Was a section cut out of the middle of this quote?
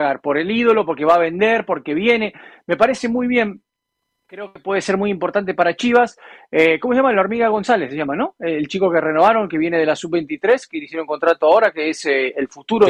no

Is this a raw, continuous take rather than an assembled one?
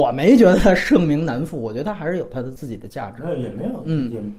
yes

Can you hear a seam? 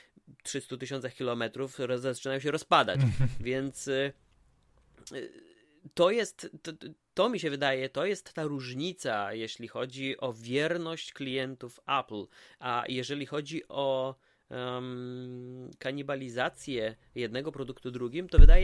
no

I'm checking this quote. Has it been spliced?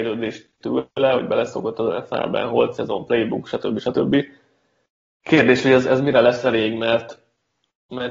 no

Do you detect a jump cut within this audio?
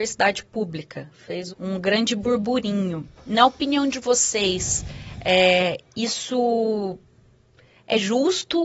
yes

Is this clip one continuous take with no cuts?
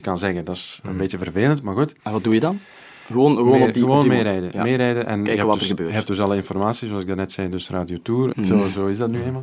no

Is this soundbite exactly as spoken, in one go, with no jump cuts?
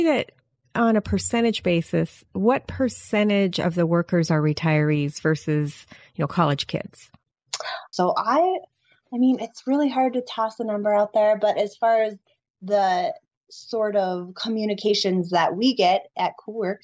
no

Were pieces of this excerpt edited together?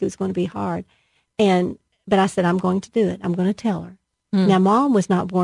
no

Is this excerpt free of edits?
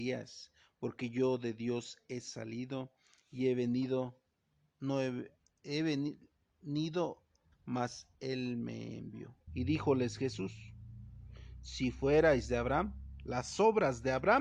no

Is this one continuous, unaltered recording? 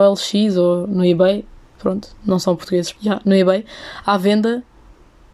no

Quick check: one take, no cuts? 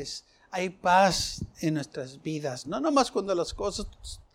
no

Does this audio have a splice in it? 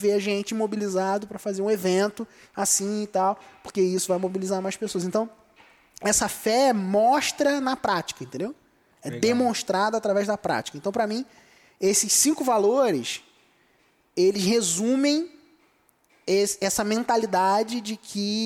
no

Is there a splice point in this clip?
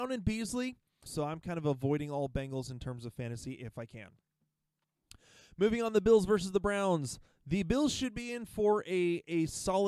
yes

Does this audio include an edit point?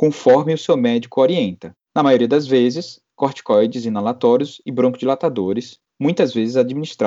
no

